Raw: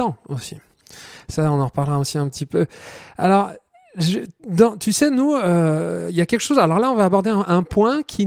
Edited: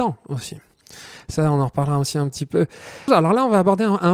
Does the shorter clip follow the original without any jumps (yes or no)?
no